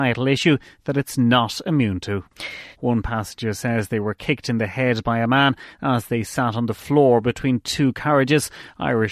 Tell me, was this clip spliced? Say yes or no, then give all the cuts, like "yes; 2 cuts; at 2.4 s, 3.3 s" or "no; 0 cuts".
yes; 1 cut; at 2.7 s